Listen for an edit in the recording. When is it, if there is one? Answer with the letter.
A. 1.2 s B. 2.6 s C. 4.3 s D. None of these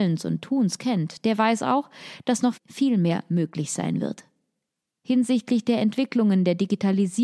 B